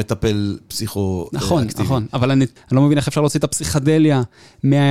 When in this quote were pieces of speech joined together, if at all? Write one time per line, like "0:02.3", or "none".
0:02.6